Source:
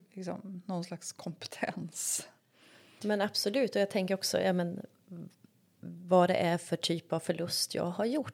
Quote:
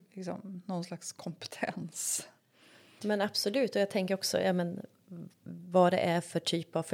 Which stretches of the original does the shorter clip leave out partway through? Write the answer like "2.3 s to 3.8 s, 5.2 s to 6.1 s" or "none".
5.3 s to 5.7 s